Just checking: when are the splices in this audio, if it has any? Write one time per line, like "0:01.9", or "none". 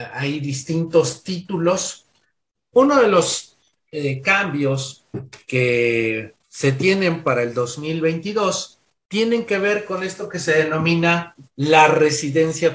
0:02.7
0:06.4